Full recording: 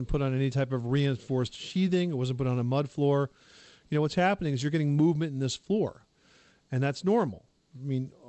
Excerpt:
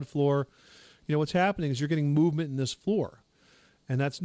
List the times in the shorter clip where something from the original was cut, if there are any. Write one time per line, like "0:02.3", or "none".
none